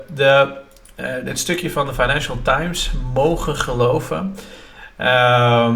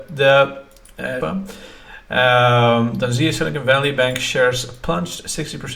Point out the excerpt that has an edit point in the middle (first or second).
second